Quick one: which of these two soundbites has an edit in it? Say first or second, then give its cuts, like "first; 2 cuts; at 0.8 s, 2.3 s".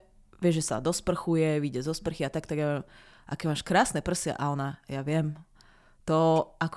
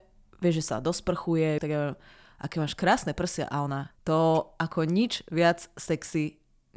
second; 2 cuts; at 1.6 s, 3.9 s